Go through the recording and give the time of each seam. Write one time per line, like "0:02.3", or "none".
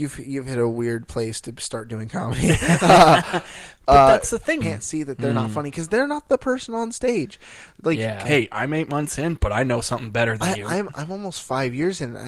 0:04.6
0:08.2

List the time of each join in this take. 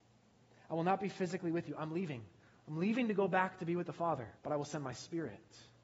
0:04.4

